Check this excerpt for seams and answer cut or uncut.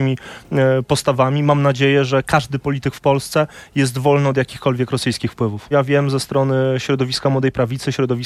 cut